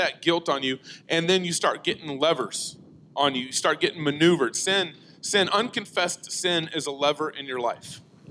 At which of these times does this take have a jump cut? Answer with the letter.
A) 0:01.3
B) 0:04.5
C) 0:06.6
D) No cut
D